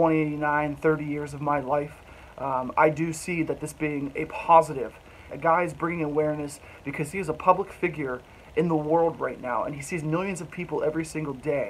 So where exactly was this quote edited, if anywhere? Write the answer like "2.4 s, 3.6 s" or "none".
5.3 s